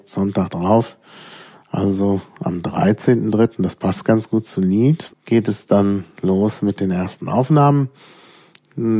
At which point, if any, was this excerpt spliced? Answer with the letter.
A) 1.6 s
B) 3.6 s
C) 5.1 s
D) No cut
C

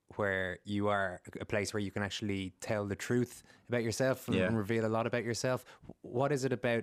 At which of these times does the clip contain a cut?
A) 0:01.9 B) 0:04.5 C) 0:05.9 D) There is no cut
D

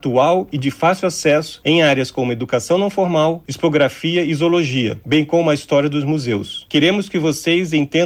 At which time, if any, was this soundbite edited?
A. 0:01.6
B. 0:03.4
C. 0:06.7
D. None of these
B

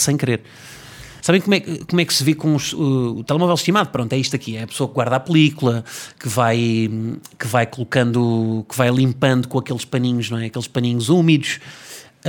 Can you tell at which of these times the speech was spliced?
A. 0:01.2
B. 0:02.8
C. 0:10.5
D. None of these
A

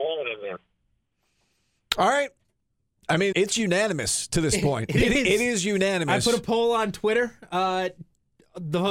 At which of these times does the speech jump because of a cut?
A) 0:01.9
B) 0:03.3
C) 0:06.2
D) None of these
B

